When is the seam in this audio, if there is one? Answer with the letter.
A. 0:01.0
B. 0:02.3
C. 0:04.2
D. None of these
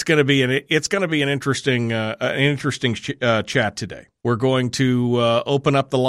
C